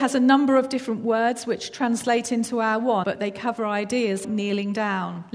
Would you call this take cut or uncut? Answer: cut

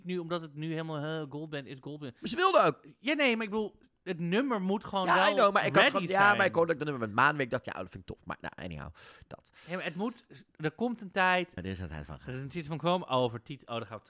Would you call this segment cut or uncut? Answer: cut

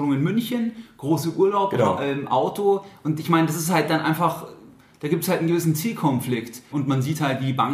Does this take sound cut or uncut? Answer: cut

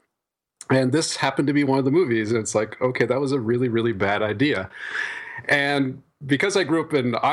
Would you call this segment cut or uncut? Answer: uncut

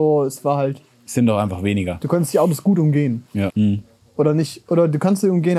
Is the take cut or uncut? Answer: cut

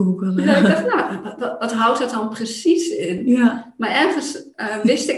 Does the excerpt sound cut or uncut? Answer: uncut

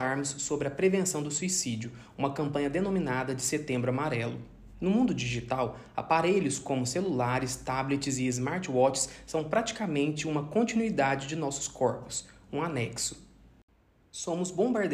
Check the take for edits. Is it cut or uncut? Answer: uncut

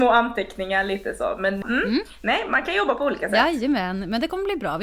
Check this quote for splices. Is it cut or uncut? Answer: cut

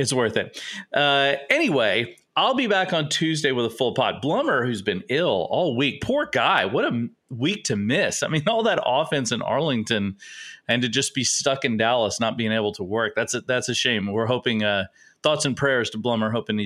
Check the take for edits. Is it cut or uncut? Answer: uncut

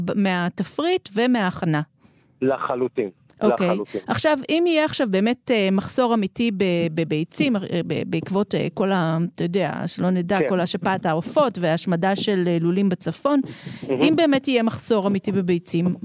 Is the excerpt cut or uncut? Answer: uncut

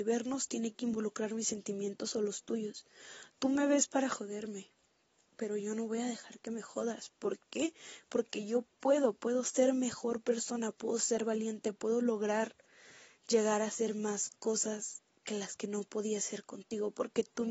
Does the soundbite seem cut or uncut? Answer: uncut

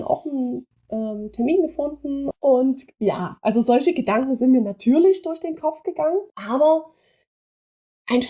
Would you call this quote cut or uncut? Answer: cut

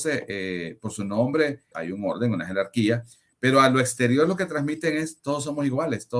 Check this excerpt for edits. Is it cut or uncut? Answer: cut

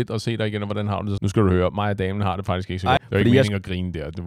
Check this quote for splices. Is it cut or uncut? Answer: cut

